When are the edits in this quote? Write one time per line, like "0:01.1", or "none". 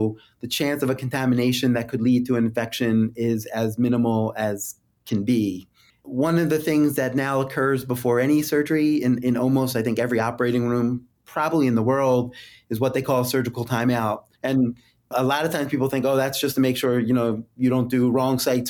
0:14.3